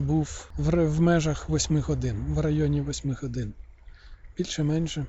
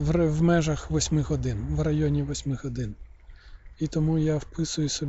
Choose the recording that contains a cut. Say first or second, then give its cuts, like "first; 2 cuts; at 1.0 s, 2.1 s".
second; 1 cut; at 3.7 s